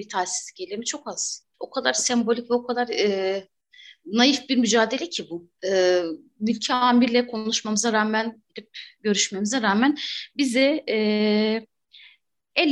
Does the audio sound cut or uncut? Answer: cut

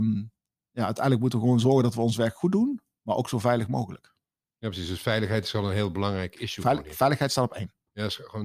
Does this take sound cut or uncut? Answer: uncut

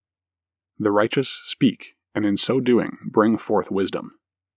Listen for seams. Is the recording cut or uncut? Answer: uncut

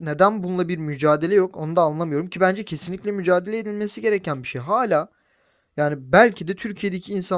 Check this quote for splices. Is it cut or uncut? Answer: uncut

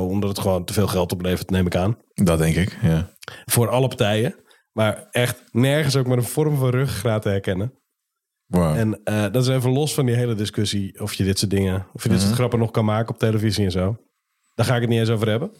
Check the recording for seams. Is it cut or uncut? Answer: uncut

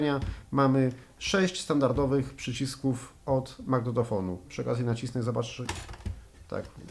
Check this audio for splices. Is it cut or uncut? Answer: cut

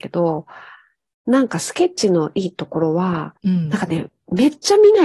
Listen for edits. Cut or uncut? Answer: cut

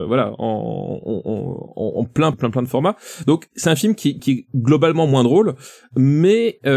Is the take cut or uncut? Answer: cut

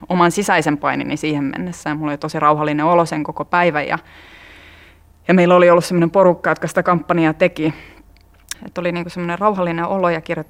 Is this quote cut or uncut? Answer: cut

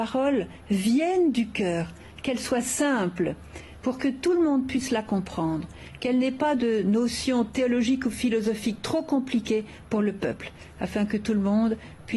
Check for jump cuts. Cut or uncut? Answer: uncut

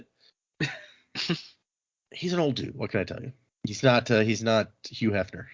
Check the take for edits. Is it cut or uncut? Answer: uncut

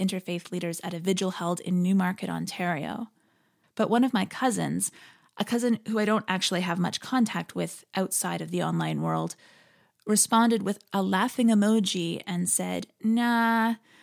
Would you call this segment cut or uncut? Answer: cut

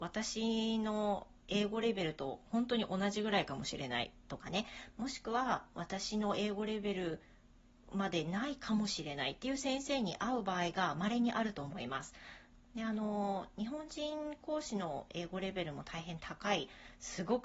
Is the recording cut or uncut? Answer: cut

